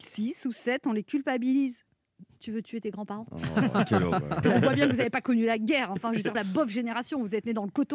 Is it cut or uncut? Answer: cut